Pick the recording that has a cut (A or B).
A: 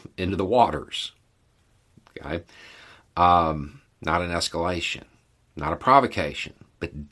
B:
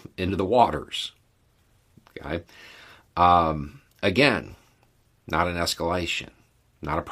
A